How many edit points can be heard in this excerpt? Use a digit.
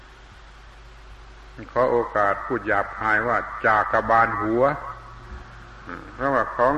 1